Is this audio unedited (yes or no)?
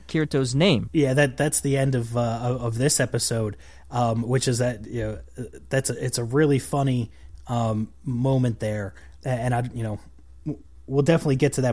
no